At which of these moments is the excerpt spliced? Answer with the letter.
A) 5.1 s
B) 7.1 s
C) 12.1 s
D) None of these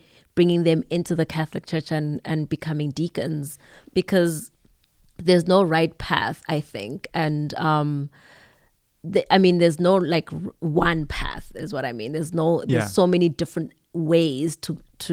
D